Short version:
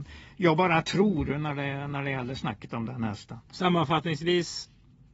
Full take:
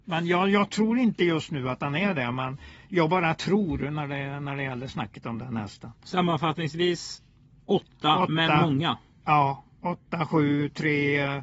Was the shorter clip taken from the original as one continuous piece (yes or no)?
yes